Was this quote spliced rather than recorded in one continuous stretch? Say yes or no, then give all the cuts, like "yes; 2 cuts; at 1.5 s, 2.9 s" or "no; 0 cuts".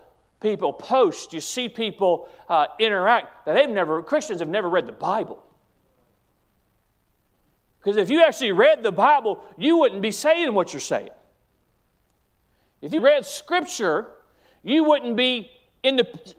yes; 1 cut; at 13.0 s